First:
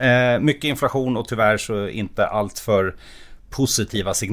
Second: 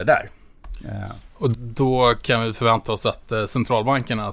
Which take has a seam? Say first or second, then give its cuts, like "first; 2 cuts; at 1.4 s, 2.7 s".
second; 1 cut; at 1.5 s